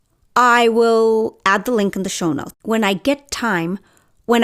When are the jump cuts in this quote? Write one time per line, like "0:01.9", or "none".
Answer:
0:02.5